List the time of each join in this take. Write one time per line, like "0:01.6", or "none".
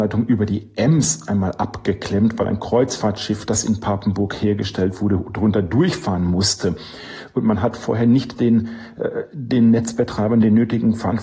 none